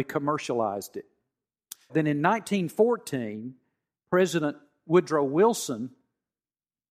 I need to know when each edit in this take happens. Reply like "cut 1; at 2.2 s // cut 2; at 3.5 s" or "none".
cut 1; at 1.9 s